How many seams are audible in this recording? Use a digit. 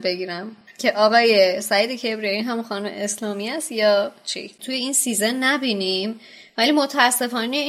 1